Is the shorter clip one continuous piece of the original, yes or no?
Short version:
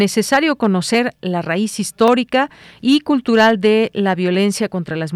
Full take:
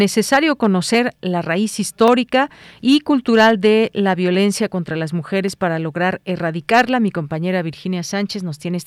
yes